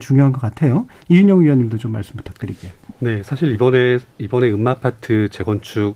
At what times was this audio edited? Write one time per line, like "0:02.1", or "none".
none